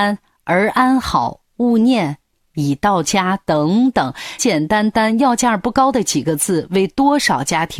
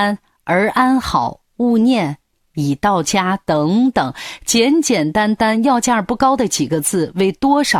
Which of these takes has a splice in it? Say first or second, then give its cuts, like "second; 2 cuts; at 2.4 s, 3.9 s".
first; 1 cut; at 4.4 s